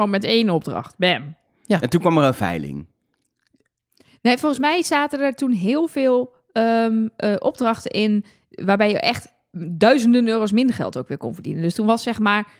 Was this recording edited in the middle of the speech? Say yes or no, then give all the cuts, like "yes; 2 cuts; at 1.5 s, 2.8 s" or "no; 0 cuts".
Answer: no; 0 cuts